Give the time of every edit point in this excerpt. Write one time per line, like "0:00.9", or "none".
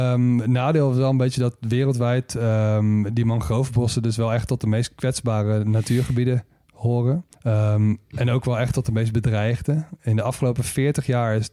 0:07.3